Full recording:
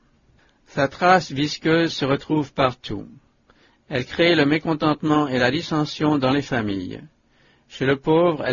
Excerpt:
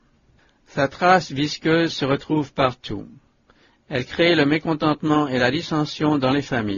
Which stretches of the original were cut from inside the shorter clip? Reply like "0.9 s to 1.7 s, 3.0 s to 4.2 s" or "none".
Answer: none